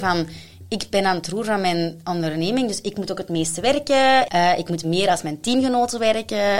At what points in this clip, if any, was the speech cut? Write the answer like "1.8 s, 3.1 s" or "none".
4.3 s